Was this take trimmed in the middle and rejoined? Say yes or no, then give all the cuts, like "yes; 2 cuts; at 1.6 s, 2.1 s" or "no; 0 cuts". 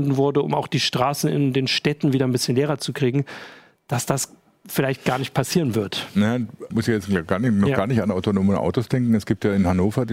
yes; 1 cut; at 6.7 s